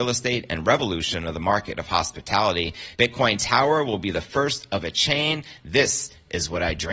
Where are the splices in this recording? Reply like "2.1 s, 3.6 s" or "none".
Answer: none